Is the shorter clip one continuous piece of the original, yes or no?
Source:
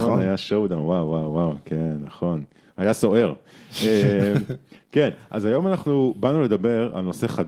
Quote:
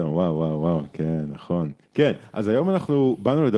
no